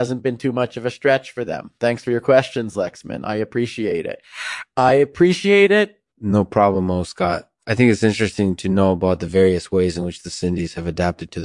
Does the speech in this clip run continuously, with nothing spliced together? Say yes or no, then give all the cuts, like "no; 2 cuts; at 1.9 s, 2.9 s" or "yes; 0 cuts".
no; 1 cut; at 6.1 s